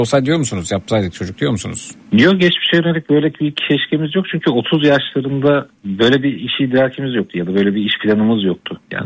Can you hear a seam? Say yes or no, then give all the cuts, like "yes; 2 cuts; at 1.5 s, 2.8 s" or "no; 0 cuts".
yes; 2 cuts; at 2.0 s, 5.7 s